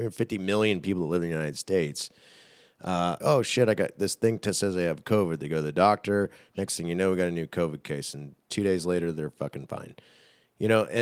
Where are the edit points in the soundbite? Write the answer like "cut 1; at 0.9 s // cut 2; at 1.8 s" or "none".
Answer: cut 1; at 3.2 s